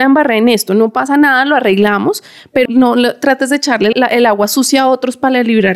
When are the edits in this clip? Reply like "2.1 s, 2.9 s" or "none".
2.7 s, 3.9 s